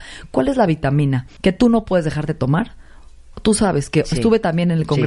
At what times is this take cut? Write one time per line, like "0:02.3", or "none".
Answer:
0:01.4
0:03.3